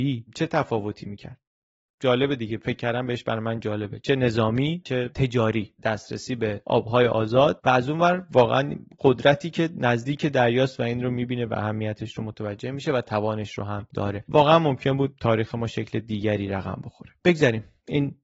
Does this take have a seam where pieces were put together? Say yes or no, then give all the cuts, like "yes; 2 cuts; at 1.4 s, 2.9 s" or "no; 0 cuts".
no; 0 cuts